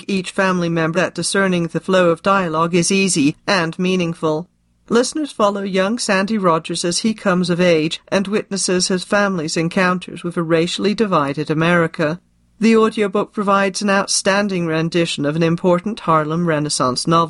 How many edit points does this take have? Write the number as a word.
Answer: one